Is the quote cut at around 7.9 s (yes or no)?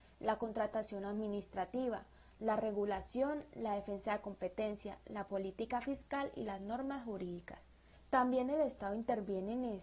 yes